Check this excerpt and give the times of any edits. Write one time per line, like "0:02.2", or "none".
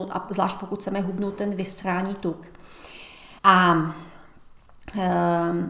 0:03.4